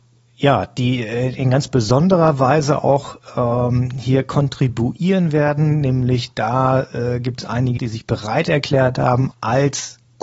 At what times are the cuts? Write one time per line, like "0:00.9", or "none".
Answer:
0:07.8
0:09.3